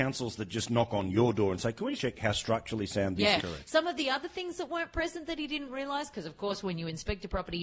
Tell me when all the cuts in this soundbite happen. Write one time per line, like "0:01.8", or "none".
0:02.0
0:03.4